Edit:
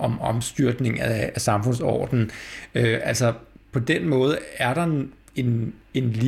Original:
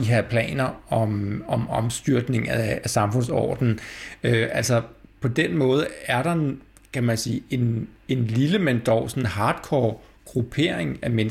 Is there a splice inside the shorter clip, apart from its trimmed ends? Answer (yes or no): yes